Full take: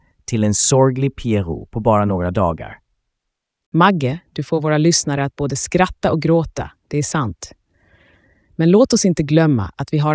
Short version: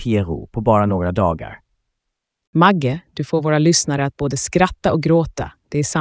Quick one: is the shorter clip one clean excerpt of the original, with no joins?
yes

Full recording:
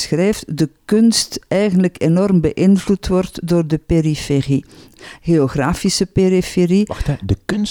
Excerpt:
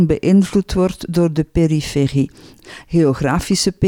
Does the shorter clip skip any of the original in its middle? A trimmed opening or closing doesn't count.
no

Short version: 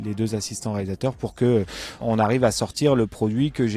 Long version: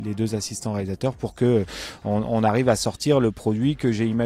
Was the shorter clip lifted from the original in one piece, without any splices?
no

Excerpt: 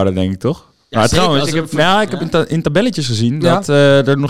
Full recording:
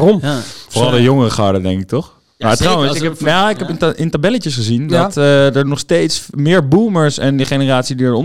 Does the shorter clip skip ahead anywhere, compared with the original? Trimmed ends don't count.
no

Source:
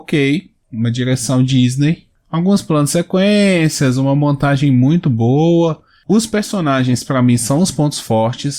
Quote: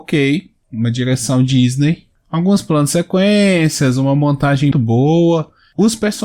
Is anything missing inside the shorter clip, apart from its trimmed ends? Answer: yes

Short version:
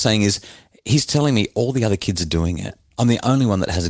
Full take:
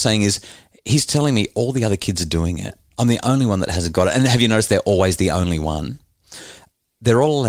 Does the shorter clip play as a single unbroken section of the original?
yes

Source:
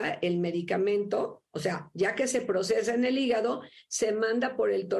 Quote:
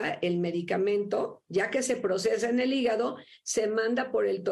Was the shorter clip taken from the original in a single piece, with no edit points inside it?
no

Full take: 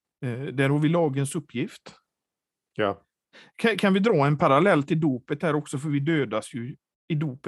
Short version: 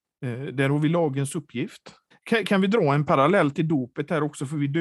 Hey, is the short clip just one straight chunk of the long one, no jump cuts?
no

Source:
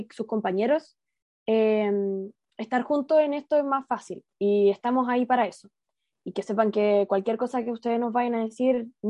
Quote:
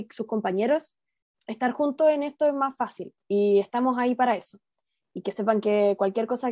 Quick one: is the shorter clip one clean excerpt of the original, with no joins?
no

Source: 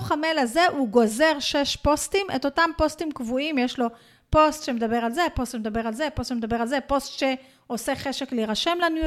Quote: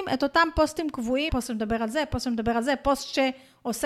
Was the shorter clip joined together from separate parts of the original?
yes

